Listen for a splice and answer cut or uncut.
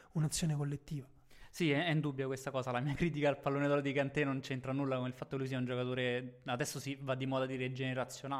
uncut